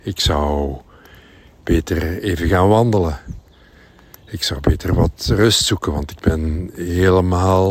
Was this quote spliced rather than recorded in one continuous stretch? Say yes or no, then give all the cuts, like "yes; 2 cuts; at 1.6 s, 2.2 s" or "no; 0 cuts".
no; 0 cuts